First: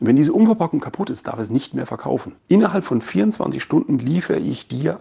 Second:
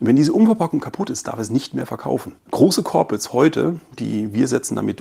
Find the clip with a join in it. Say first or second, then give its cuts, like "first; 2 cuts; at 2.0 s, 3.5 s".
first; 1 cut; at 2.4 s